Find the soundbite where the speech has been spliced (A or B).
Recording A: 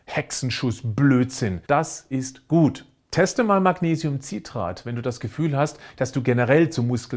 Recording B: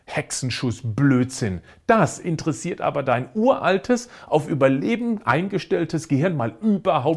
A